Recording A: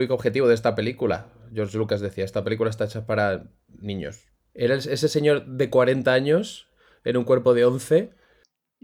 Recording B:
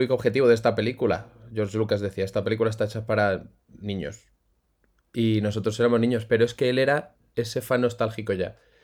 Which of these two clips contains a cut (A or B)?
A